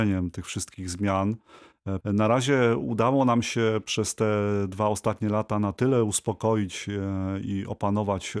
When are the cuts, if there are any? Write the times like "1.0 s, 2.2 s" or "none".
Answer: 2.0 s